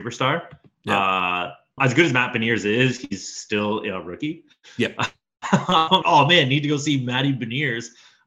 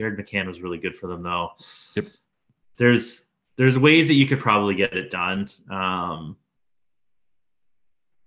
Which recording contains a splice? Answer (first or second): first